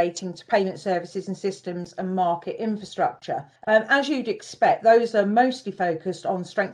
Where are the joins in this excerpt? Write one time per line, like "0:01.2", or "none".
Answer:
0:03.6